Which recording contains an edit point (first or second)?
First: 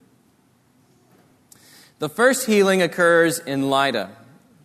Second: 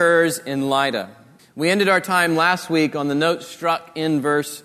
second